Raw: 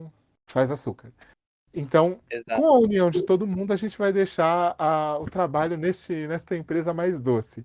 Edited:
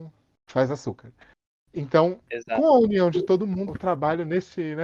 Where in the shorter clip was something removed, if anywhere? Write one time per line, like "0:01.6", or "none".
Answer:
0:03.7